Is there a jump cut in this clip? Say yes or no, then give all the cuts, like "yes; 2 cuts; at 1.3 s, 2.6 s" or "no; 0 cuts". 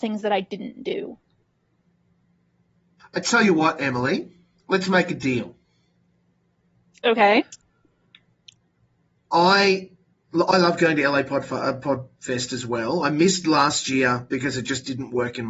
yes; 1 cut; at 3.0 s